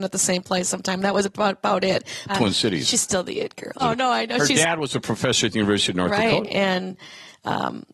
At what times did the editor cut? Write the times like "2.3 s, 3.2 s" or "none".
2.3 s, 3.8 s, 6.4 s